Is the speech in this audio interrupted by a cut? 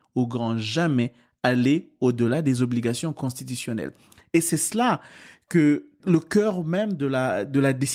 no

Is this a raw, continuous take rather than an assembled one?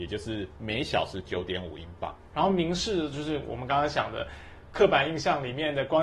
no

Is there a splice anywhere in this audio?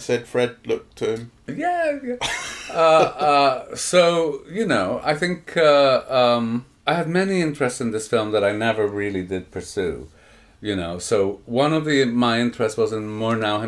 no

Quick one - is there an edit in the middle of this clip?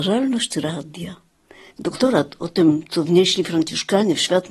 yes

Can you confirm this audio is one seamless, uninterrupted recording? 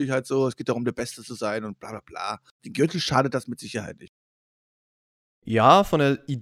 no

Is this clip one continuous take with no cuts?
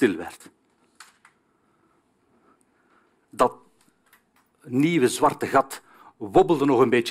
yes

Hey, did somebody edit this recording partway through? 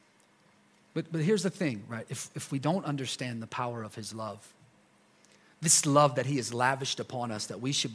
yes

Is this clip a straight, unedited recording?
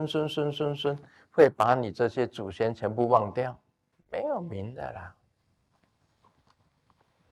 no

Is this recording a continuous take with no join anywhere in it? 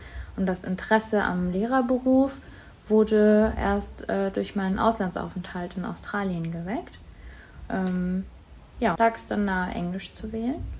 no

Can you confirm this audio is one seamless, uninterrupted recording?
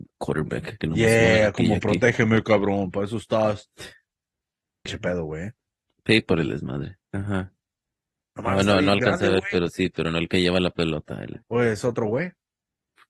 no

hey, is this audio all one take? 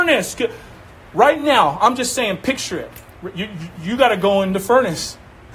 yes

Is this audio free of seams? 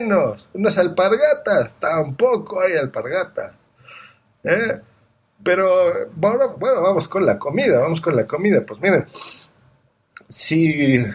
yes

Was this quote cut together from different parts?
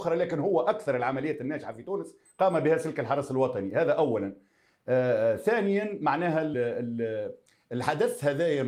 yes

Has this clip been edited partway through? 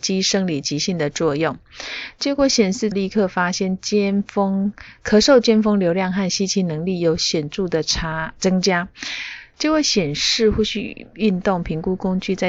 yes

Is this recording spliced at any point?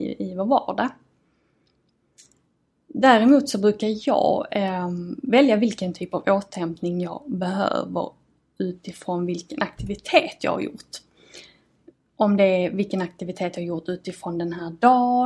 no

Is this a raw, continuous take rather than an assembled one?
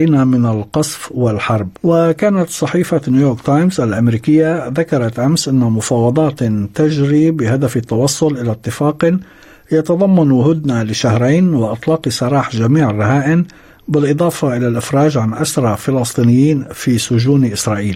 no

